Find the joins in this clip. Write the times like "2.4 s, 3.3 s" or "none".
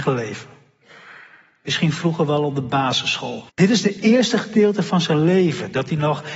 3.5 s